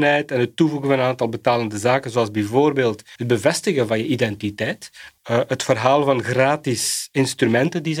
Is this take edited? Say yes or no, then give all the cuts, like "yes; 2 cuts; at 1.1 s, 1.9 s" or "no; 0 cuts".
yes; 2 cuts; at 3.1 s, 5.2 s